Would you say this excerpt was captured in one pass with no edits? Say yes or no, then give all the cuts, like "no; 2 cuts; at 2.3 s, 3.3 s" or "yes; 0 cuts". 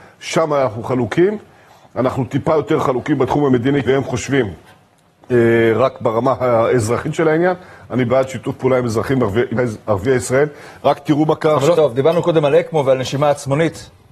no; 3 cuts; at 3.8 s, 9.6 s, 11.7 s